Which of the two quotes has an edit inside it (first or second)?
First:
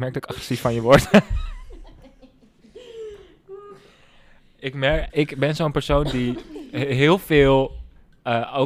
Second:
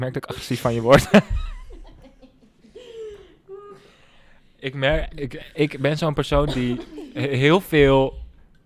first